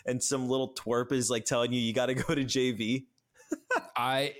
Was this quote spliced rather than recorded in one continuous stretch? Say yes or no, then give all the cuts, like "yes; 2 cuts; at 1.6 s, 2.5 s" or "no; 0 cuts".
no; 0 cuts